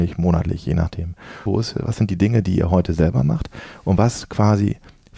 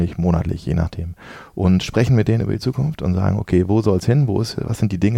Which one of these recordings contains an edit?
first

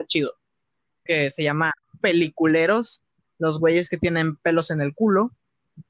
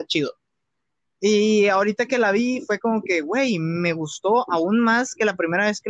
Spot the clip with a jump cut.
first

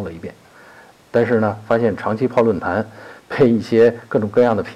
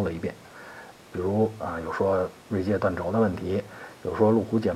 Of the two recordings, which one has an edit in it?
second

